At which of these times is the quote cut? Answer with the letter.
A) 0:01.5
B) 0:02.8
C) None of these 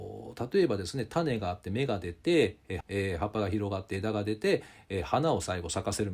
B